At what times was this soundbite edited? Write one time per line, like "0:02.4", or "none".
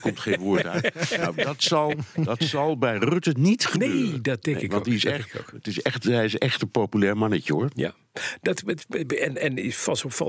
none